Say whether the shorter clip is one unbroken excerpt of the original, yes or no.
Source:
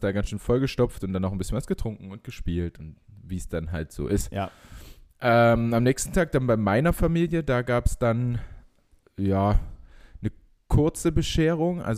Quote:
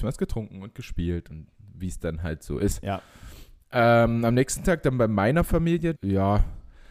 no